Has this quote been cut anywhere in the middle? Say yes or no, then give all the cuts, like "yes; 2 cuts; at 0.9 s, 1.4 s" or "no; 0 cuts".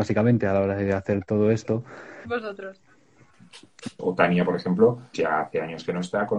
yes; 3 cuts; at 2.2 s, 4.0 s, 5.1 s